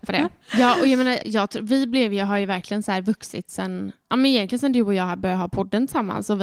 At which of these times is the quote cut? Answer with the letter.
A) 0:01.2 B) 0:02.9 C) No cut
A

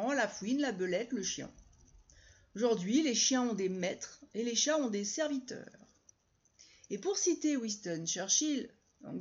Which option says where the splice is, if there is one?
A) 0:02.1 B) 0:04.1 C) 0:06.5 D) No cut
D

